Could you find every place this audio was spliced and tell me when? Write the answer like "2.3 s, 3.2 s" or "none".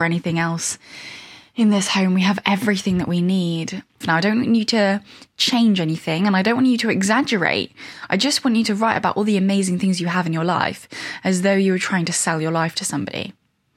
4.0 s